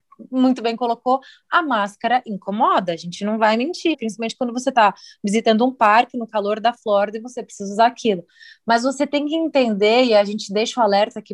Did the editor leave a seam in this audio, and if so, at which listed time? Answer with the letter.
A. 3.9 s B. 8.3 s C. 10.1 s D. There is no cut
A